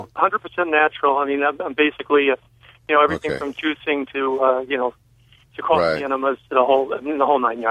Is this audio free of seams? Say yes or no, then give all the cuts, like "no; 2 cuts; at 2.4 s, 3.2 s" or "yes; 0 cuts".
yes; 0 cuts